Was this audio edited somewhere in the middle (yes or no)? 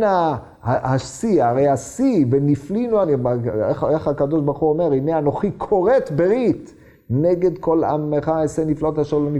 no